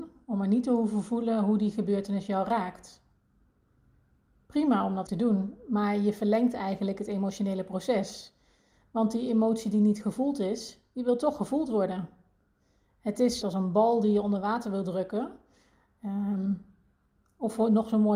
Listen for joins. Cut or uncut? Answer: cut